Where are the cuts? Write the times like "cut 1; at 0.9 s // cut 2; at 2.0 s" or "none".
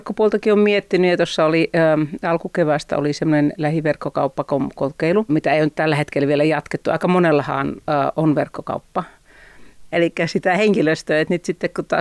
cut 1; at 5.3 s // cut 2; at 9.9 s